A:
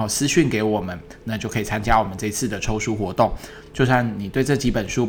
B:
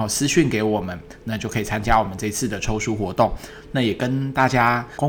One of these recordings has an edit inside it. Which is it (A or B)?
B